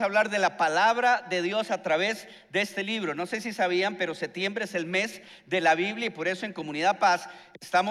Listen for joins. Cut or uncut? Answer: uncut